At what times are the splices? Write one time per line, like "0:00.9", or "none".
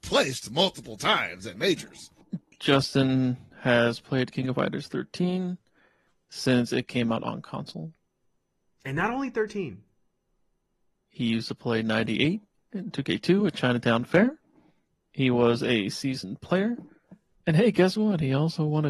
0:17.3